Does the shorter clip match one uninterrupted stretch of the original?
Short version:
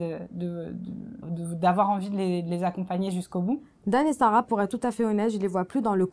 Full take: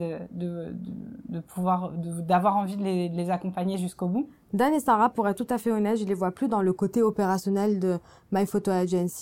no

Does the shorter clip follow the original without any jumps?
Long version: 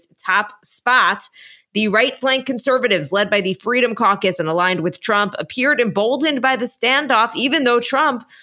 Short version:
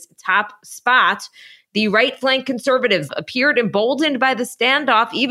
no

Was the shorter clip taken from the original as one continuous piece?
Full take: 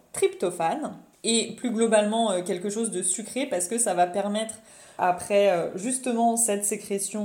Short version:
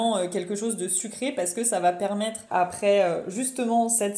no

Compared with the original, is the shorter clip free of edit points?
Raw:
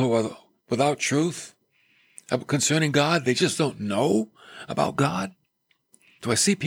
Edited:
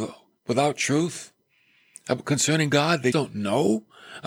no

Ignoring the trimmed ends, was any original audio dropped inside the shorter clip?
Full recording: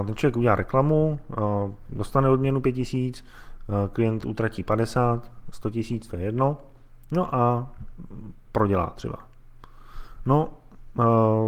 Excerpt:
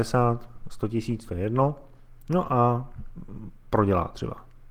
no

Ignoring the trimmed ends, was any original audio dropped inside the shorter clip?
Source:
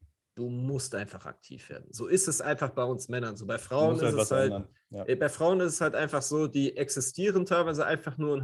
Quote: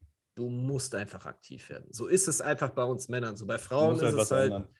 no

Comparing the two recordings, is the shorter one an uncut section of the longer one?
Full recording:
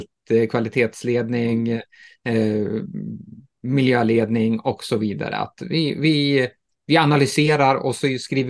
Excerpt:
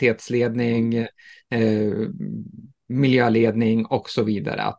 yes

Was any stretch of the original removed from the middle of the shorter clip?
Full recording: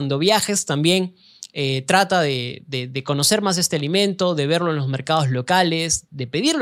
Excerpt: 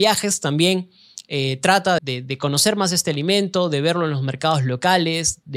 yes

